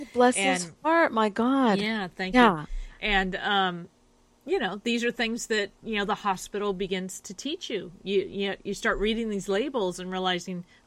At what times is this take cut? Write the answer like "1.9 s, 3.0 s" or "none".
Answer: none